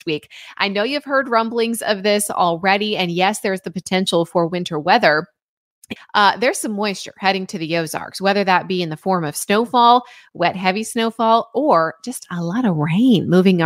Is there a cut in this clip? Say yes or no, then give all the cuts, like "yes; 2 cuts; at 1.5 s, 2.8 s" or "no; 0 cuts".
yes; 1 cut; at 6.0 s